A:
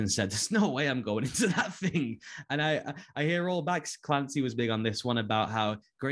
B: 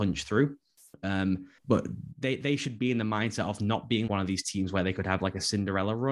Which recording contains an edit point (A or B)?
B